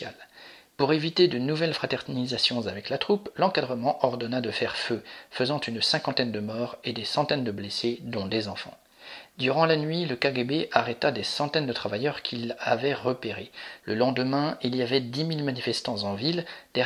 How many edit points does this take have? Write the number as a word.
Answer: two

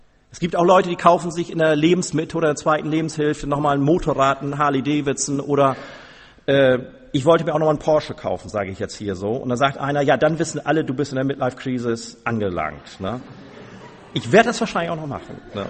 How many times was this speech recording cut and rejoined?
zero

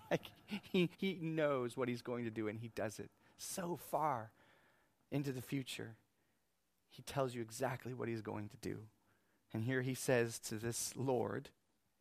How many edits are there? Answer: one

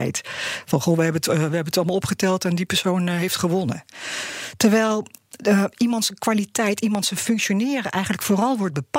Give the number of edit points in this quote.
zero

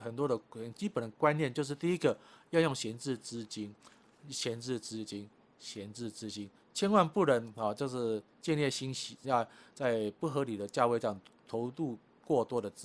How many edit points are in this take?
one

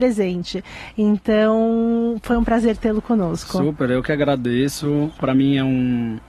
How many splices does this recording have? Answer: one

